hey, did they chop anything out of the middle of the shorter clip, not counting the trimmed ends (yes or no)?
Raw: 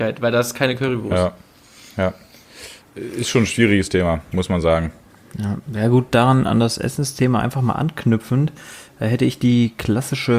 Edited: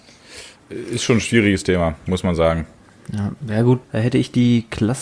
yes